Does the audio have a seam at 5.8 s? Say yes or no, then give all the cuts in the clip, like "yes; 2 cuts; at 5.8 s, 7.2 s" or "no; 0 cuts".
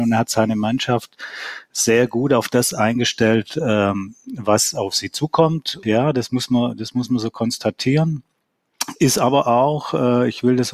yes; 1 cut; at 5.8 s